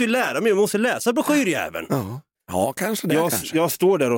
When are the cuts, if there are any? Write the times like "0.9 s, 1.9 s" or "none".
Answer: 2.3 s